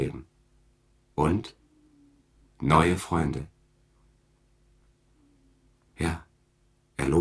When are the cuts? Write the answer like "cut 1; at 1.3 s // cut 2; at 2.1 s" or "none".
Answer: cut 1; at 5.9 s